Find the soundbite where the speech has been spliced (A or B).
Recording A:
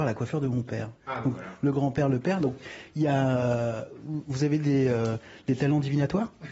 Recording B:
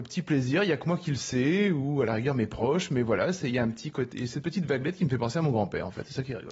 A